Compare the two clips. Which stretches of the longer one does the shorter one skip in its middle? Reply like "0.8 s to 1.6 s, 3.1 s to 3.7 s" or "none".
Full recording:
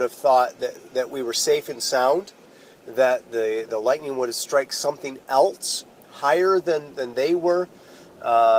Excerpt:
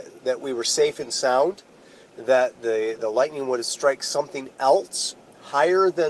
none